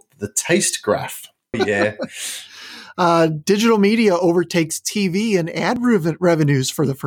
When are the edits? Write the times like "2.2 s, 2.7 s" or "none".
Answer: 1.5 s